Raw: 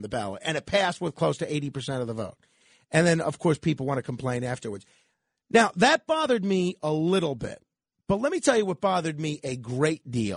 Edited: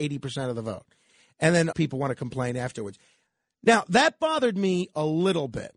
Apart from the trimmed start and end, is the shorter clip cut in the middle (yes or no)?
yes